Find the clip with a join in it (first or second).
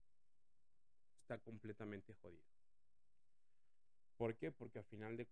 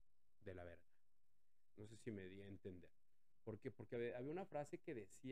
second